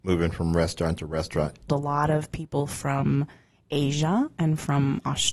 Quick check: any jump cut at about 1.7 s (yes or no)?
yes